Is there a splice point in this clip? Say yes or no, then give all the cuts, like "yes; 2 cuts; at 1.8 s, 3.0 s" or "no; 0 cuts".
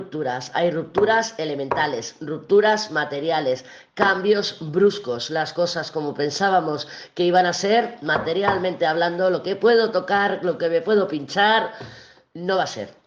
no; 0 cuts